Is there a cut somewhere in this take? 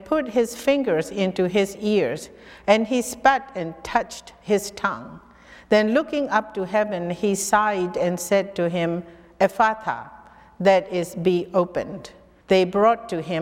yes; 1 cut; at 12.4 s

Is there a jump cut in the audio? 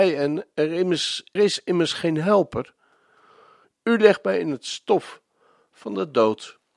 yes; 2 cuts; at 1.4 s, 3.6 s

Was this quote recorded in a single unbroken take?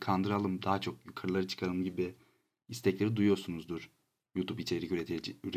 yes; 0 cuts

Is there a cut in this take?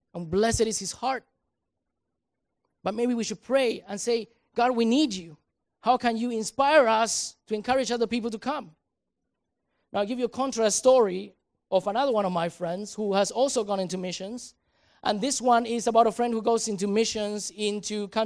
no; 0 cuts

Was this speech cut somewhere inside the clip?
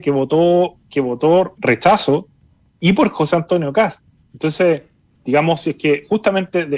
yes; 2 cuts; at 1.6 s, 5.2 s

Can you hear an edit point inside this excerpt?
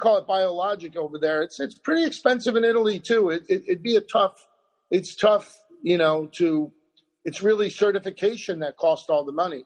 no; 0 cuts

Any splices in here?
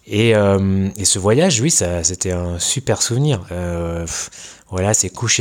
yes; 1 cut; at 3.5 s

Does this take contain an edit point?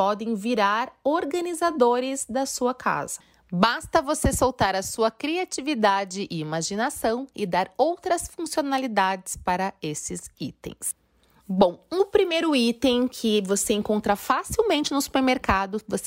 no; 0 cuts

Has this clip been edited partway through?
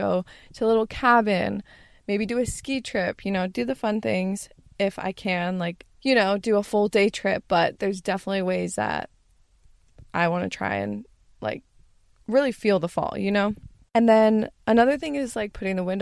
yes; 1 cut; at 5.9 s

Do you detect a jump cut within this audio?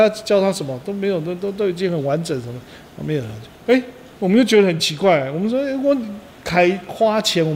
yes; 1 cut; at 3.6 s

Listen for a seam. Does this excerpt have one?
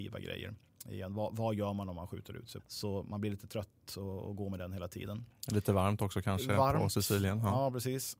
yes; 1 cut; at 2.6 s

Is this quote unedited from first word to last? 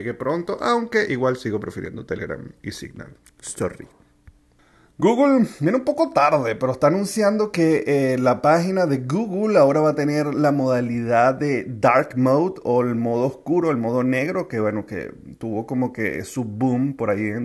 yes; 0 cuts

